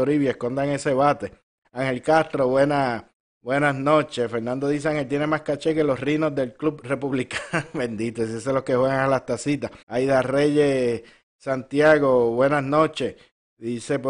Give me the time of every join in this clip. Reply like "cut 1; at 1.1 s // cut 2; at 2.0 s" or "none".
cut 1; at 1.6 s // cut 2; at 9.8 s

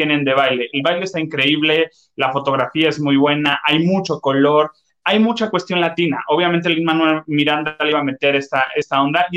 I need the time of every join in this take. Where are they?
none

